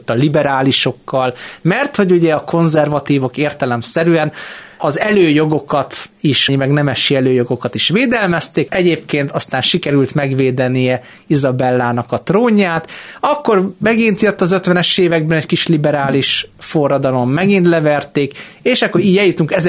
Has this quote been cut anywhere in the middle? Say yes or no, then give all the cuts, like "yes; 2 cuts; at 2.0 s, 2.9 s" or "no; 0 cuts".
yes; 2 cuts; at 6.5 s, 8.7 s